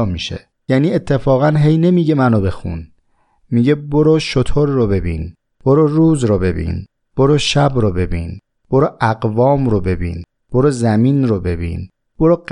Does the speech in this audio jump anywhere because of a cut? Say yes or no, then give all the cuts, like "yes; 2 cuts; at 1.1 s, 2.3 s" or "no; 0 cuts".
no; 0 cuts